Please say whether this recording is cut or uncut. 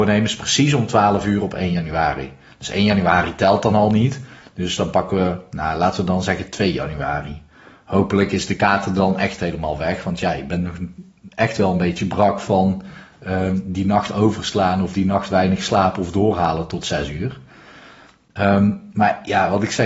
uncut